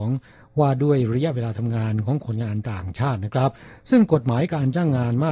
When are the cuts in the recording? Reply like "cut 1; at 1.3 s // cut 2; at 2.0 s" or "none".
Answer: none